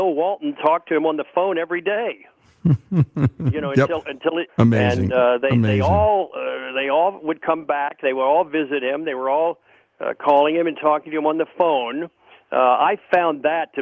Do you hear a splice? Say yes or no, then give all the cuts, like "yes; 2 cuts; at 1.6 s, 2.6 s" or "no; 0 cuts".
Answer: yes; 1 cut; at 4.5 s